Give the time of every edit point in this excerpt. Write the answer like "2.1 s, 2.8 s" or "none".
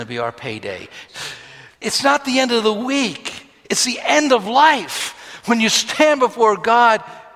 1.1 s